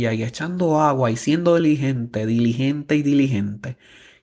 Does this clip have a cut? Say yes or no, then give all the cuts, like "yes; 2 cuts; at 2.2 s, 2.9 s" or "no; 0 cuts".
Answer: no; 0 cuts